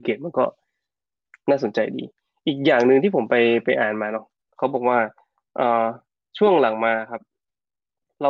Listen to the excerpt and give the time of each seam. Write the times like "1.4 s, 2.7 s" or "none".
none